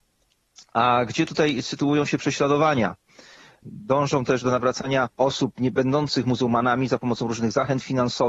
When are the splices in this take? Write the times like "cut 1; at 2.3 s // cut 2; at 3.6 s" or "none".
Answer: cut 1; at 3.6 s // cut 2; at 5.1 s